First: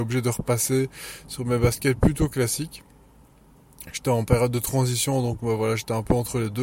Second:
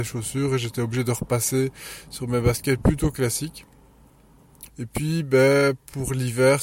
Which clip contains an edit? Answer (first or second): second